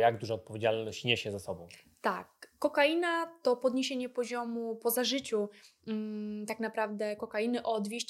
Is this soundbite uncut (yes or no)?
yes